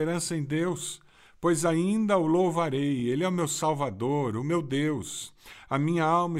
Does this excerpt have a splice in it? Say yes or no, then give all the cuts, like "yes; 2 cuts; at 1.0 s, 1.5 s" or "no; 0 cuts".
no; 0 cuts